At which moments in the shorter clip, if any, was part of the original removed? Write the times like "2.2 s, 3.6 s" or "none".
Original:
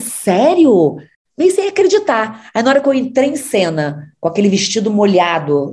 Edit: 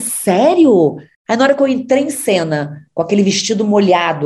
1.3 s